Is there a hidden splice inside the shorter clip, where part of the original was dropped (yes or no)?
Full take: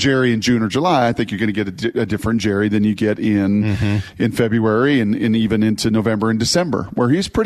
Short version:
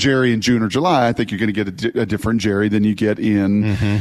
no